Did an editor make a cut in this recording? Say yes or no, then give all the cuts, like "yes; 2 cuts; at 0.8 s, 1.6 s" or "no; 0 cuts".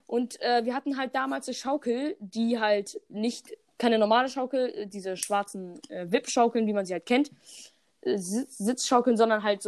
no; 0 cuts